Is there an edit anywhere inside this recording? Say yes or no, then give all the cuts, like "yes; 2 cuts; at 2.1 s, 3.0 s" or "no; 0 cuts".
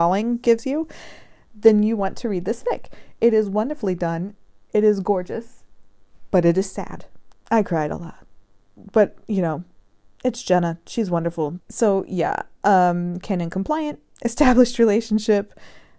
yes; 2 cuts; at 7.3 s, 11.6 s